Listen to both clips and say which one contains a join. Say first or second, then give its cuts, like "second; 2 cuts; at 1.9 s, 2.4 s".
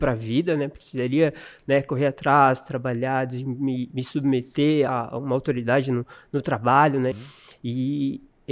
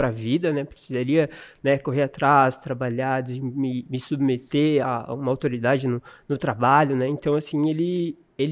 first; 1 cut; at 7.1 s